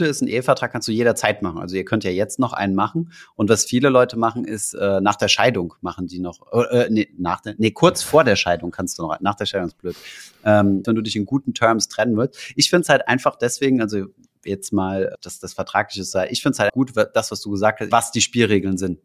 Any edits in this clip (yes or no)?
yes